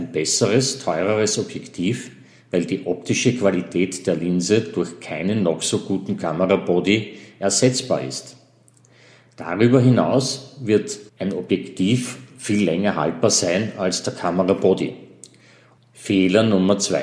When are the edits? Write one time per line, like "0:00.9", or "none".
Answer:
0:11.1
0:15.8